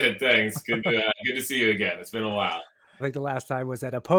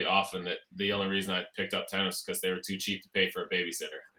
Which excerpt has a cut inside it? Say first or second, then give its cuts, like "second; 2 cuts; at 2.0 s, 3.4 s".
first; 1 cut; at 3.0 s